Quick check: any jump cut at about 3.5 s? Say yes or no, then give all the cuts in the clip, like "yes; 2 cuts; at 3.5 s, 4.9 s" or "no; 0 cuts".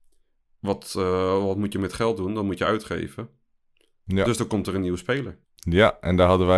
no; 1 cut; at 5.4 s